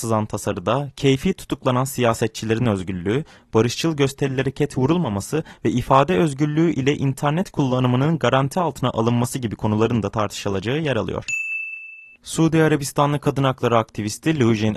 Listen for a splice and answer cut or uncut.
uncut